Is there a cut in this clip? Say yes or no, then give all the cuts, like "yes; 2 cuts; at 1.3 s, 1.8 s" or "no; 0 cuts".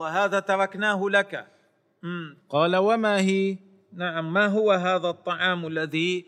yes; 1 cut; at 2.4 s